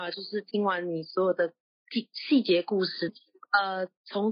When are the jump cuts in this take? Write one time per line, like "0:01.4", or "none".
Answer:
0:03.1